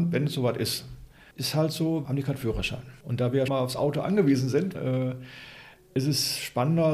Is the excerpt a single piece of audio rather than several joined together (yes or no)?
no